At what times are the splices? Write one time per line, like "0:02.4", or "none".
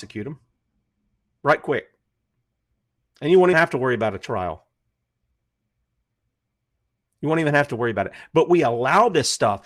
0:03.5